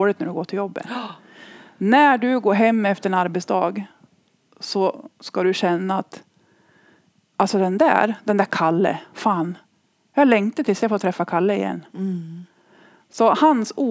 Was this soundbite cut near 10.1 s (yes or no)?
yes